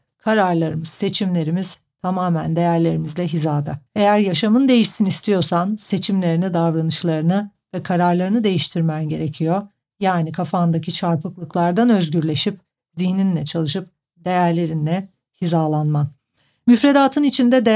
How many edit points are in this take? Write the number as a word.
one